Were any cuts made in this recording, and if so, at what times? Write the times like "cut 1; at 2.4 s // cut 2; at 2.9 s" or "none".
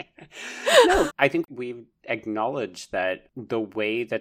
cut 1; at 1.1 s